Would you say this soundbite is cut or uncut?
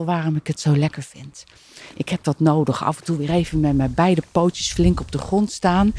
uncut